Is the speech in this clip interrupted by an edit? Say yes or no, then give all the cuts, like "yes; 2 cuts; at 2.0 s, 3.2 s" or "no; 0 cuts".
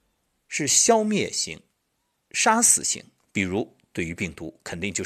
no; 0 cuts